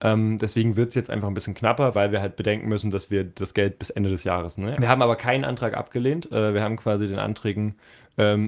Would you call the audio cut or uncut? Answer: cut